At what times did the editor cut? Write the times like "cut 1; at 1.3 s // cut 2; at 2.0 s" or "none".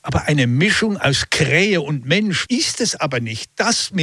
cut 1; at 2.5 s